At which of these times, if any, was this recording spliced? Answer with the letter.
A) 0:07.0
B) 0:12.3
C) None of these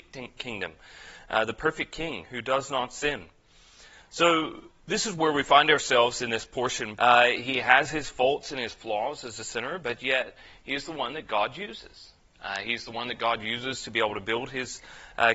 A